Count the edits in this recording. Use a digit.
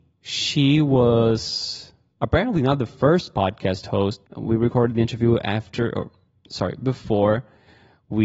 1